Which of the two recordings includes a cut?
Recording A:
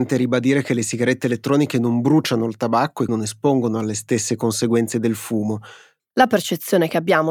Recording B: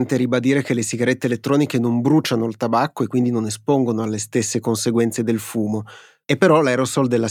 A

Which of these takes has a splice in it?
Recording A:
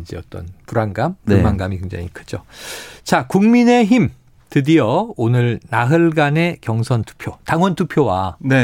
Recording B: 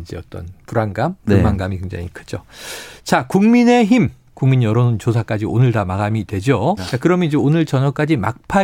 B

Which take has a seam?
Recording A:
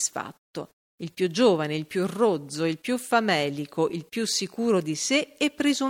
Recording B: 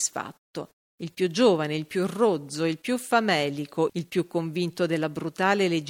B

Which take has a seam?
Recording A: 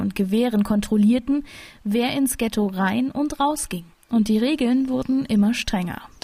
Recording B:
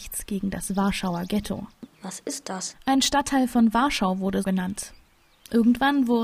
B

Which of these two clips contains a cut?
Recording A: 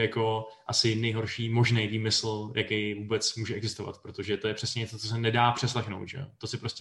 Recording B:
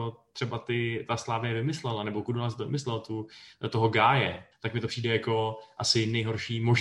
B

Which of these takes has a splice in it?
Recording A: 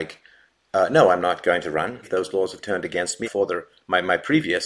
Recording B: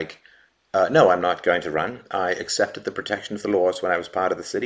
A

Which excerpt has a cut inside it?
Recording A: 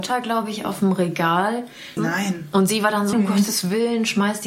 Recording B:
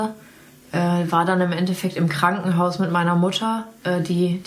A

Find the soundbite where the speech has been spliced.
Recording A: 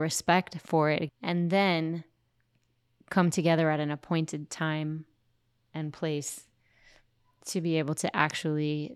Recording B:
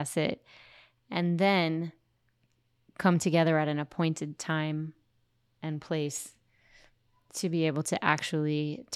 A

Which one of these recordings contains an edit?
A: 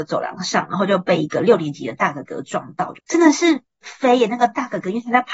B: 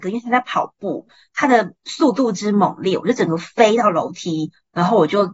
A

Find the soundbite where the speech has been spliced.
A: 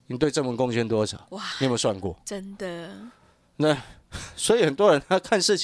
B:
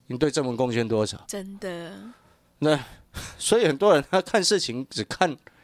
B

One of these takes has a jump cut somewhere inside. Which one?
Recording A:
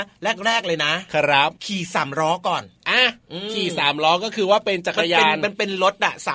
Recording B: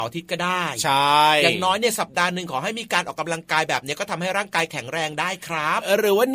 A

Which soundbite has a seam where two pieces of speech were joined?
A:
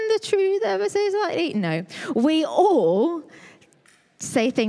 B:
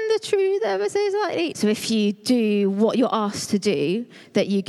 B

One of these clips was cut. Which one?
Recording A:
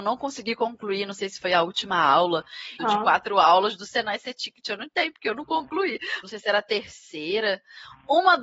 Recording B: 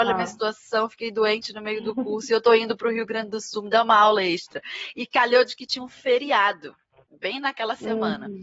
A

